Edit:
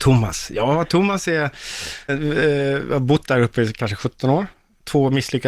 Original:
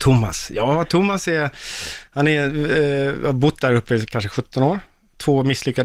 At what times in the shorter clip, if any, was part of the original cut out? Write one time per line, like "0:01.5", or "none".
0:02.1